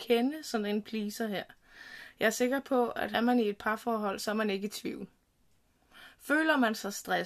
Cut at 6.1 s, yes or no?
no